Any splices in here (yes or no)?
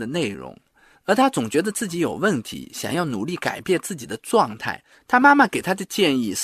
yes